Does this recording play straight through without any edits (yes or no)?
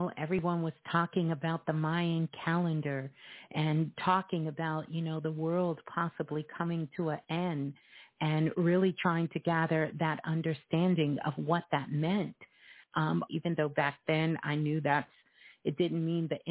no